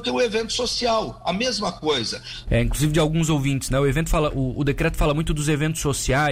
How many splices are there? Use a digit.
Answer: 1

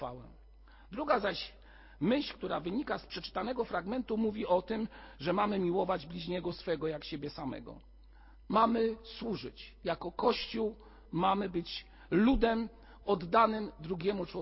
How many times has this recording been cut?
1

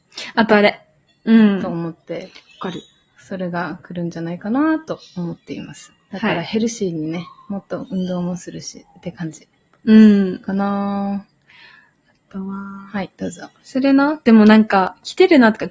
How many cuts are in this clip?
1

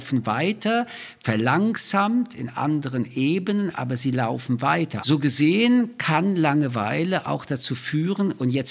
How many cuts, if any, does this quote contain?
1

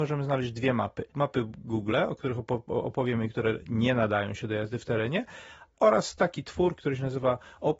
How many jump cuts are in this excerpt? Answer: 0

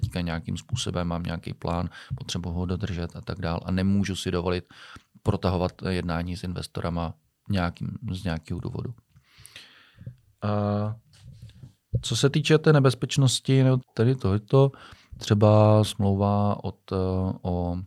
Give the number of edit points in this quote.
2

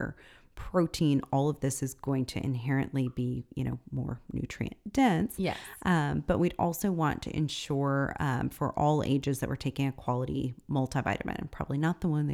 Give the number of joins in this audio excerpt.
0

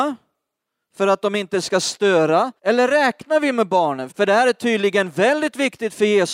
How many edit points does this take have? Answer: 2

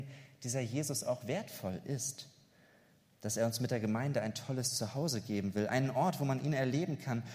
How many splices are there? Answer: 0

